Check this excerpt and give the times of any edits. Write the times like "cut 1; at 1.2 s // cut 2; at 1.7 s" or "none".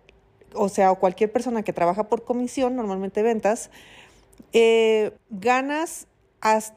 cut 1; at 5.2 s